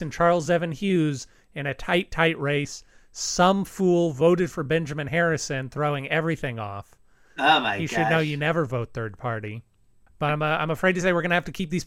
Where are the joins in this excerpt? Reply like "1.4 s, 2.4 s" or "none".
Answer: none